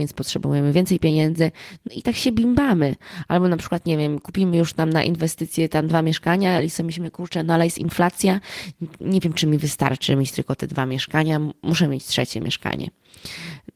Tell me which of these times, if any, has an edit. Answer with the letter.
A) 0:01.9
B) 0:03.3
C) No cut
A